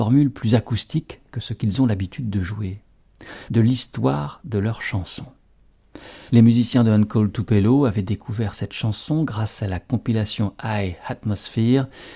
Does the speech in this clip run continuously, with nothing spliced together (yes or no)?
no